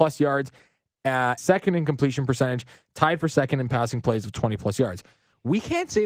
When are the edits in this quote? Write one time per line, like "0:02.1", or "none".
0:01.4